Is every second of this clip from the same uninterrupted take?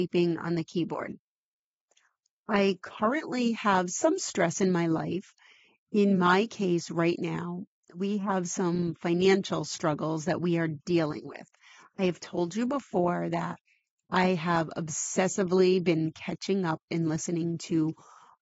yes; 0 cuts

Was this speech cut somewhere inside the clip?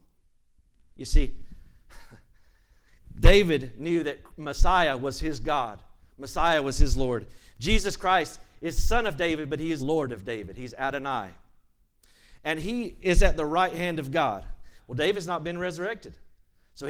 yes; 2 cuts; at 9.8 s, 14.8 s

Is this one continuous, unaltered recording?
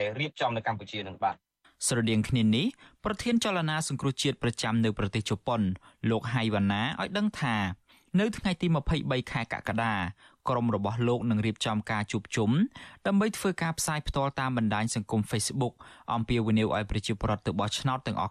yes; 0 cuts

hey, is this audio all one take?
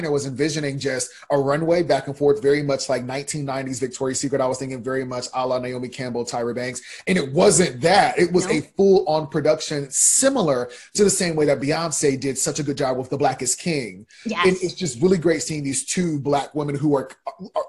yes; 0 cuts

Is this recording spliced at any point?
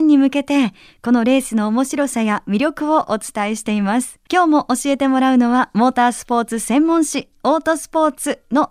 yes; 1 cut; at 4.3 s

